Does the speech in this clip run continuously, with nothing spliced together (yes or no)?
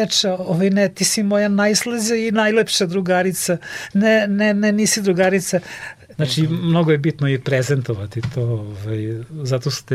no